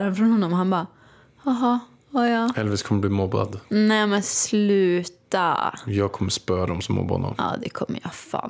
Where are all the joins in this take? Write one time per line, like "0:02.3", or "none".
none

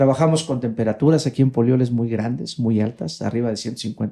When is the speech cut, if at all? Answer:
none

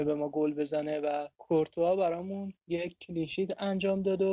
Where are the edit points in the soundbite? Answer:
0:01.3
0:02.6

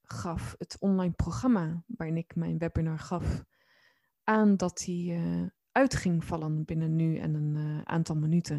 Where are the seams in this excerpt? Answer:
none

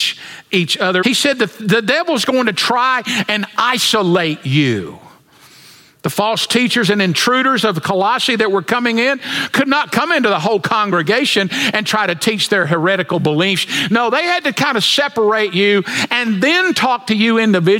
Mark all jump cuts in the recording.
0:01.0

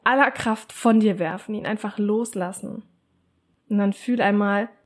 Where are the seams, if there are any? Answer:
none

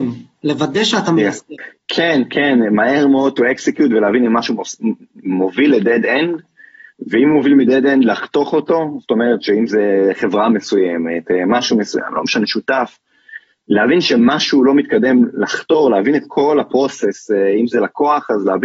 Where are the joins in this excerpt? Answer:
none

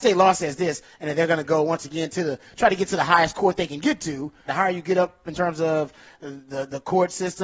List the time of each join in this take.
0:04.5

